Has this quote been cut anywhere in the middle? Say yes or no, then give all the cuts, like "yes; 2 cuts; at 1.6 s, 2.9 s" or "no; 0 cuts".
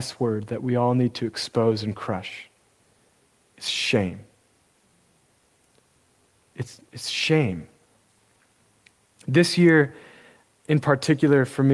no; 0 cuts